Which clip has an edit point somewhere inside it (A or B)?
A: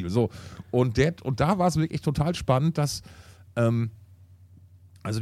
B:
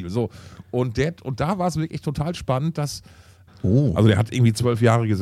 B